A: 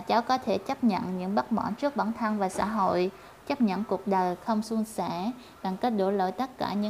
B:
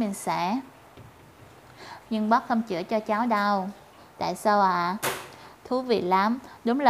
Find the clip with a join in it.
B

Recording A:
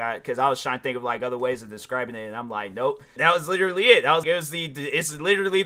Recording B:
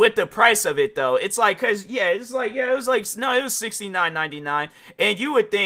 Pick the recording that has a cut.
A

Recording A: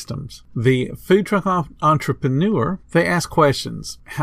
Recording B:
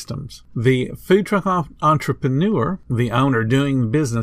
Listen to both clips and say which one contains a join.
A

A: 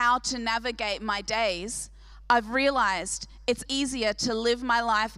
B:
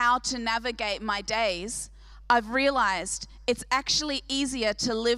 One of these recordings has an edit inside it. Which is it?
A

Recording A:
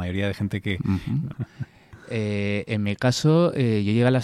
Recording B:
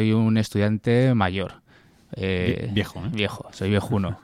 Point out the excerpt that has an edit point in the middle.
A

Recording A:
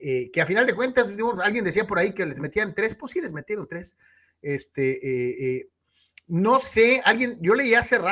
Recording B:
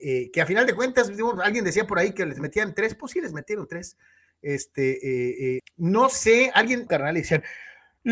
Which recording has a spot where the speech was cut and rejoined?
B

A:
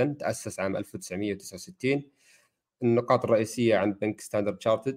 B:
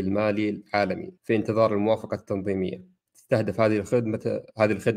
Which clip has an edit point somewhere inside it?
B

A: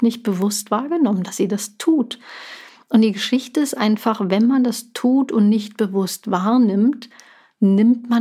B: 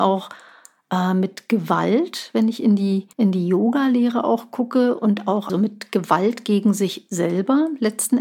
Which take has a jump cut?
B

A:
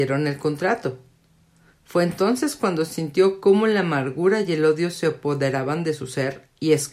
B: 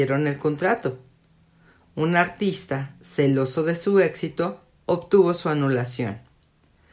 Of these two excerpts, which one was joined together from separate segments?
A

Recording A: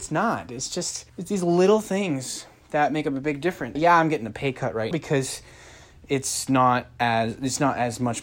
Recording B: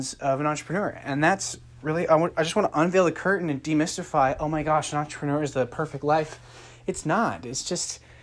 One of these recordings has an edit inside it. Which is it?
A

